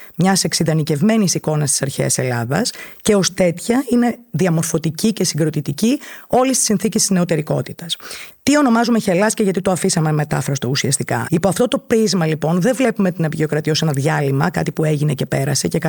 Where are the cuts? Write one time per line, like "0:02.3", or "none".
0:08.3
0:11.3